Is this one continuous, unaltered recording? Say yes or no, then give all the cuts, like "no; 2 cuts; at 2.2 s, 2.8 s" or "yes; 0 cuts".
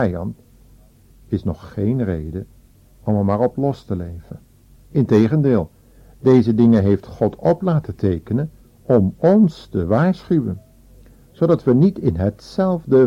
no; 1 cut; at 4.8 s